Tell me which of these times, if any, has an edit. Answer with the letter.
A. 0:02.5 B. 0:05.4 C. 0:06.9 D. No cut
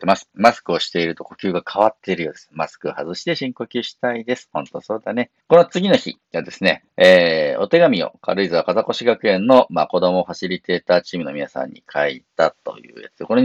B